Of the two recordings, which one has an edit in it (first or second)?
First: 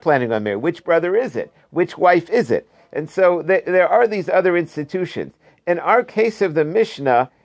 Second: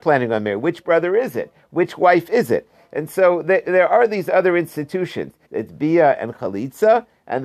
second